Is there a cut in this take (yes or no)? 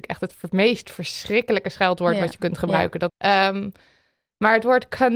yes